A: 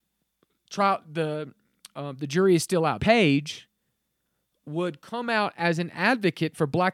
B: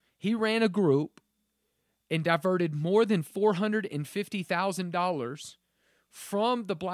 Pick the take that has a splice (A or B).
A